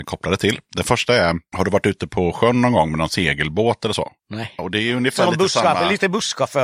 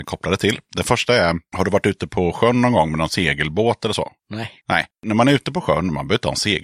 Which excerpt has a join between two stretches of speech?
first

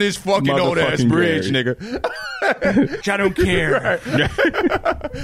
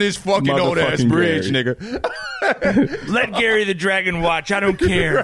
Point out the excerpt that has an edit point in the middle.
first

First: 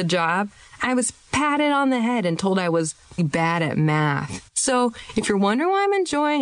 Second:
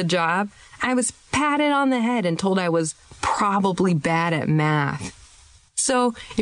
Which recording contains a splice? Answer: first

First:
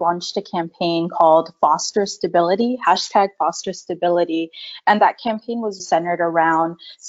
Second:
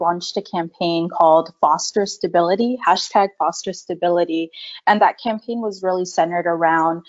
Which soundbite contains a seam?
first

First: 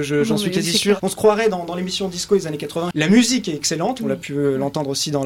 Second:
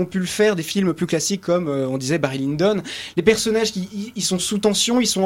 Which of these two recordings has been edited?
first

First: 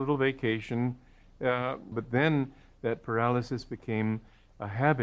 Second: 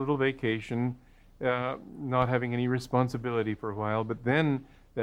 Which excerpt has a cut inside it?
first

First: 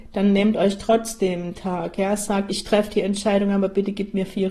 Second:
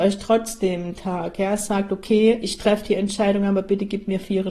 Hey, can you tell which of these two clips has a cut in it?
first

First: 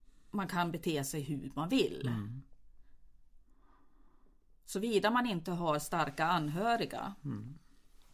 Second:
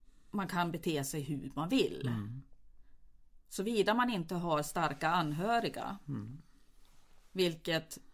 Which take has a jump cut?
second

